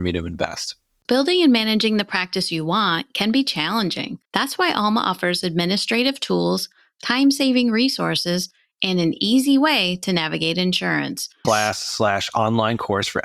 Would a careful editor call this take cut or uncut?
cut